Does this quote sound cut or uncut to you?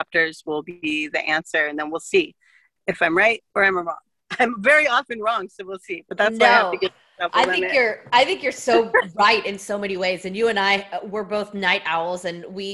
uncut